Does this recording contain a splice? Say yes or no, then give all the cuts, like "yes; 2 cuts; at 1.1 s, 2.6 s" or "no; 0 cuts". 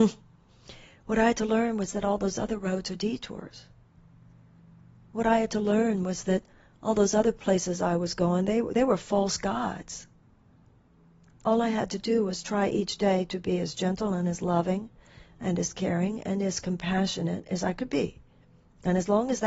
no; 0 cuts